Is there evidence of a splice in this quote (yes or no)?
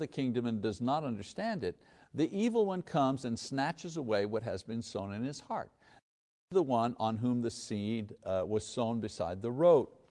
no